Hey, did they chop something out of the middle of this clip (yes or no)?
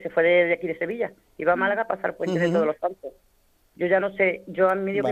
no